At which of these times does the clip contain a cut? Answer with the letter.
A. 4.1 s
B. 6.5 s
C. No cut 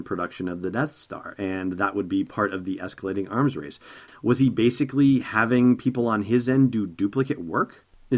A